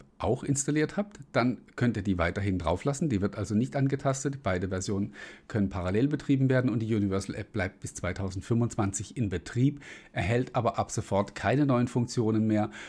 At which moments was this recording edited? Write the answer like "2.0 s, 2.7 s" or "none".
none